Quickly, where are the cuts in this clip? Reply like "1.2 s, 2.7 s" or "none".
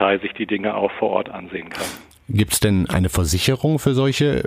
none